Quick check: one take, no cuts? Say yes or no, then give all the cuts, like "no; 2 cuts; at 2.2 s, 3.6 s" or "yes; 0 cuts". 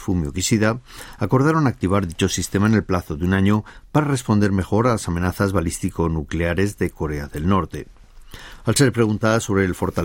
no; 1 cut; at 8.6 s